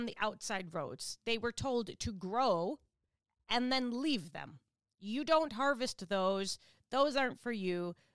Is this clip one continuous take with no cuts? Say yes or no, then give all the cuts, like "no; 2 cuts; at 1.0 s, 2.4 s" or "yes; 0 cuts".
yes; 0 cuts